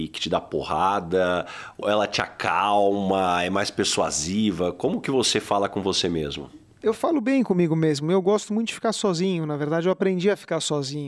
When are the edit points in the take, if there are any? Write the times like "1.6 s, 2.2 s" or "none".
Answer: 1.8 s